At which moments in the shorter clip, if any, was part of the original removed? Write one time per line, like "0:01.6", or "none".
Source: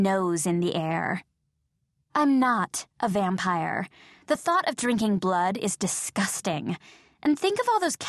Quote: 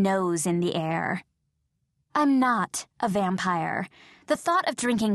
none